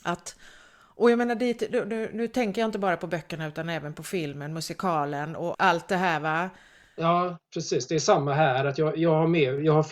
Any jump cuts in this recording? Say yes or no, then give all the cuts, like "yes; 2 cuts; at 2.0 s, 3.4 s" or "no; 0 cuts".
yes; 1 cut; at 5.5 s